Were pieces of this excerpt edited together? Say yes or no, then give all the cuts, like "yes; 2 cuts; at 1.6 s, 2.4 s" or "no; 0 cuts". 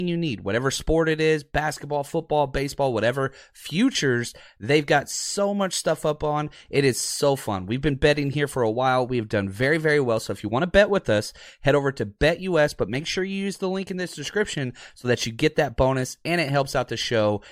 no; 0 cuts